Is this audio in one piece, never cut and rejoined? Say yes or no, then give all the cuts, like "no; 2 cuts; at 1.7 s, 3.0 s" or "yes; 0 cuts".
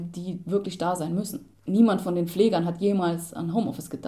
yes; 0 cuts